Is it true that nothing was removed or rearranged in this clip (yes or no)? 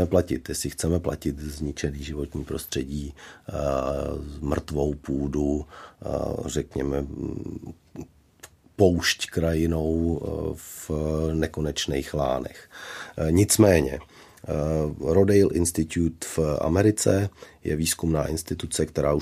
yes